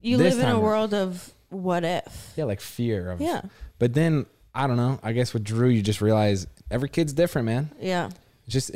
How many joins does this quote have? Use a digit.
0